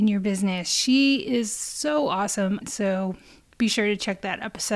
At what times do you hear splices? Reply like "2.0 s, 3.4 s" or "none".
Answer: 2.6 s